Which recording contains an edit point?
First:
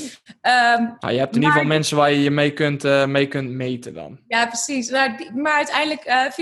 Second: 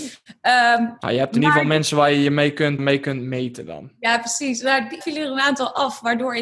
second; 2 cuts; at 2.8 s, 5.0 s

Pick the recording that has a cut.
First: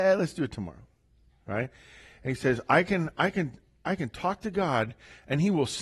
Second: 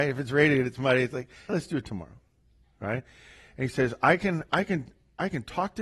second; 1 cut; at 1.5 s

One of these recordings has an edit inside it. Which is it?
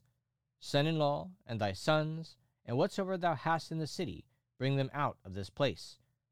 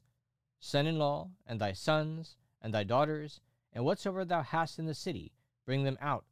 first; 1 cut; at 2.5 s

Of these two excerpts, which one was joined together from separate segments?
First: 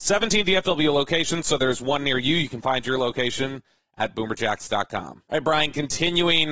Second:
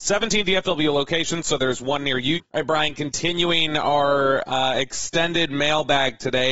second; 1 cut; at 2.3 s

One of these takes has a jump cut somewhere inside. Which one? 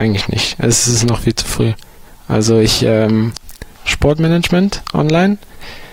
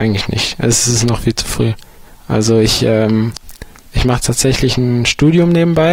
first; 1 cut; at 3.8 s

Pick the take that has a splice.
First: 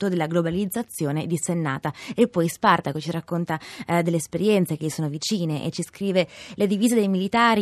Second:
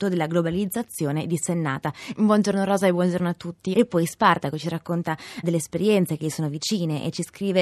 second; 3 cuts; at 2.1 s, 3.7 s, 5.4 s

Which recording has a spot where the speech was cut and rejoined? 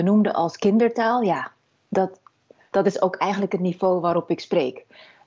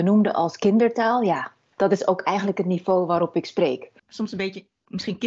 second; 2 cuts; at 1.7 s, 4.0 s

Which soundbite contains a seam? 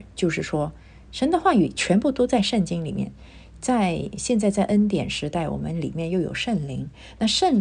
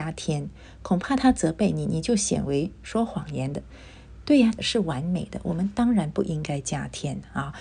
second; 1 cut; at 4.6 s

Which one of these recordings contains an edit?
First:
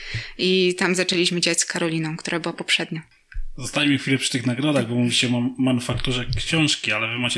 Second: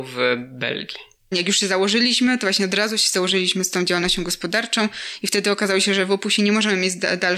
second; 1 cut; at 1.3 s

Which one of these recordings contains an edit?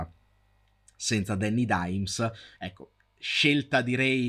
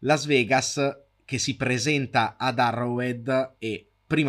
first; 1 cut; at 2.5 s

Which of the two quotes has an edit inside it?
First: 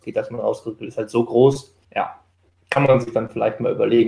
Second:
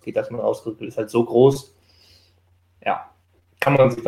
first; 1 cut; at 1.8 s

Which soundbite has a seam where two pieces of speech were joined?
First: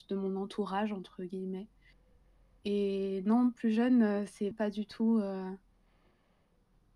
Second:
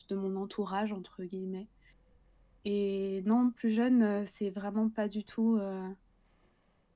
first; 1 cut; at 4.5 s

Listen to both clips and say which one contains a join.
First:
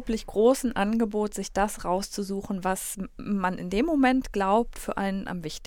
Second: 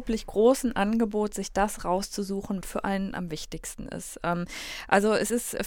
second; 1 cut; at 2.6 s

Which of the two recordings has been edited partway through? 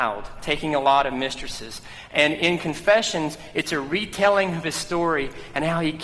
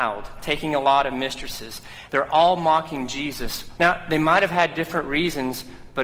second; 2 cuts; at 2.1 s, 3.8 s

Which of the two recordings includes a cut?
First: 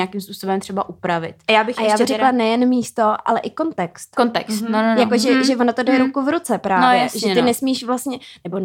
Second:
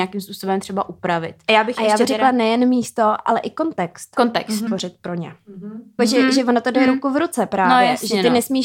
second; 2 cuts; at 4.7 s, 6.0 s

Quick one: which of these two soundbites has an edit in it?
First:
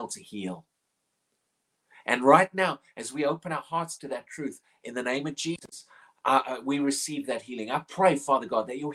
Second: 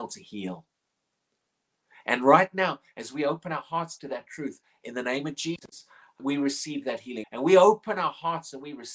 second; 2 cuts; at 6.2 s, 7.2 s

